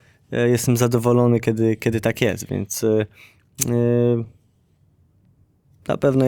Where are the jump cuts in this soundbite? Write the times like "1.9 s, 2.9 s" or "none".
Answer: none